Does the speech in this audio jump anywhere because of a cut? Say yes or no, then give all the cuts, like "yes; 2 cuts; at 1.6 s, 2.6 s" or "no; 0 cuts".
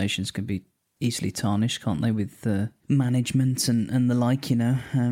no; 0 cuts